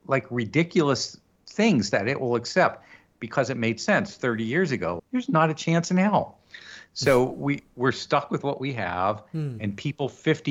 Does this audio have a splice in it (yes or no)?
yes